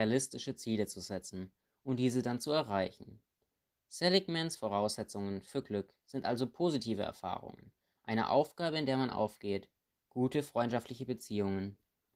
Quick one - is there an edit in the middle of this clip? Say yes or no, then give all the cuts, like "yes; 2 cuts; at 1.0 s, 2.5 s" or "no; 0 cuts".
no; 0 cuts